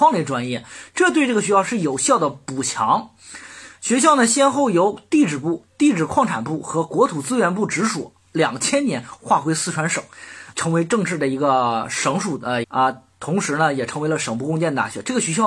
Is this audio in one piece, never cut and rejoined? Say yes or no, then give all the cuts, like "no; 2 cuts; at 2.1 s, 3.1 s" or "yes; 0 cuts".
no; 2 cuts; at 10.5 s, 12.6 s